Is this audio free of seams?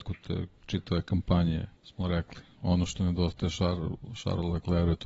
no; 1 cut; at 1.8 s

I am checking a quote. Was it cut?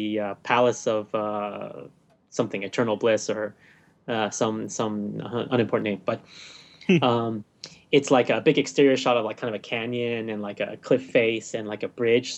no; 0 cuts

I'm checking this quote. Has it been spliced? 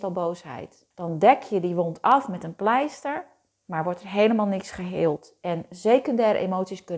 yes; 1 cut; at 0.9 s

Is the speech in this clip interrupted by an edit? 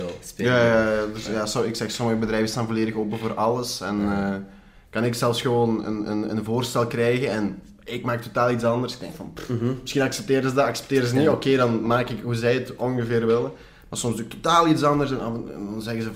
no; 0 cuts

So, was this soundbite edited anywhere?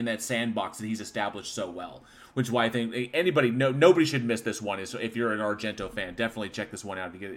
no; 0 cuts

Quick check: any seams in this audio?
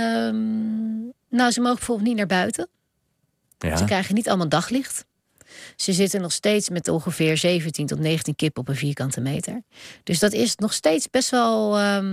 yes; 1 cut; at 1.2 s

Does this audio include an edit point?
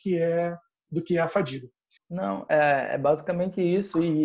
yes; 1 cut; at 2.0 s

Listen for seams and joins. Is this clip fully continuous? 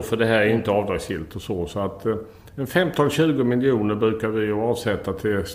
yes; 0 cuts

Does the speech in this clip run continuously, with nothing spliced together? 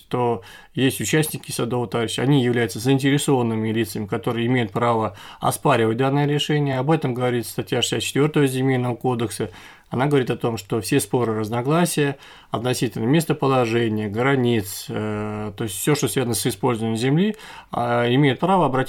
yes; 0 cuts

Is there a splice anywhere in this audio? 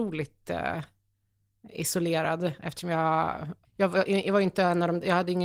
yes; 1 cut; at 3.6 s

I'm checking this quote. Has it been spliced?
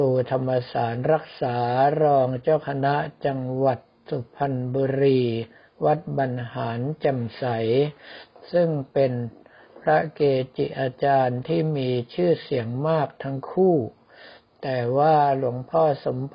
no; 0 cuts

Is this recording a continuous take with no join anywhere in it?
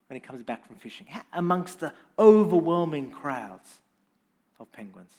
yes; 0 cuts

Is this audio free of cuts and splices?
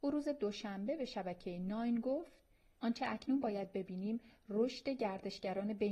yes; 0 cuts

